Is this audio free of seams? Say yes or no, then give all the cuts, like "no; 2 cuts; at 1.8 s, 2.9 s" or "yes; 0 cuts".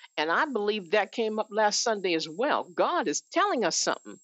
yes; 0 cuts